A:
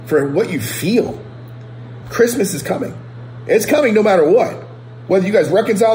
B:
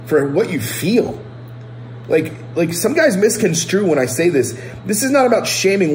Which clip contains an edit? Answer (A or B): A